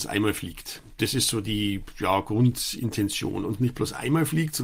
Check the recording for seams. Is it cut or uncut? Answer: uncut